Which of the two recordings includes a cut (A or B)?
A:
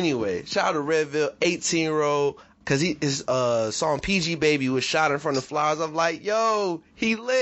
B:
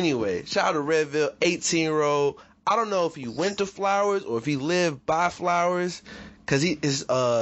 A